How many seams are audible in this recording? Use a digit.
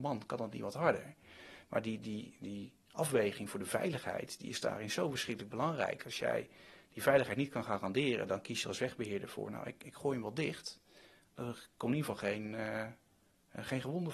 0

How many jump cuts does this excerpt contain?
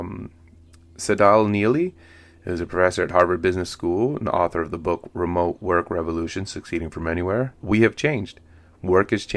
1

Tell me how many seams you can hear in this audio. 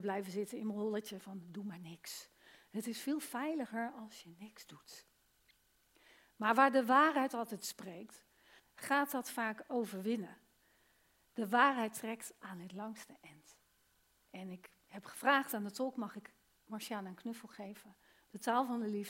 1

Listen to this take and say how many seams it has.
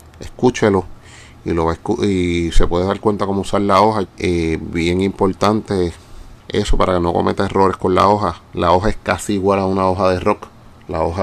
2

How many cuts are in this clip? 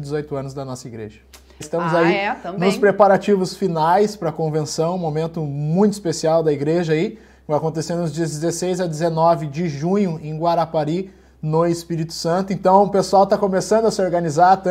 1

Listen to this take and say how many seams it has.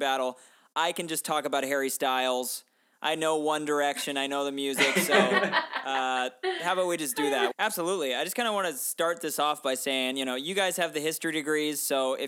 1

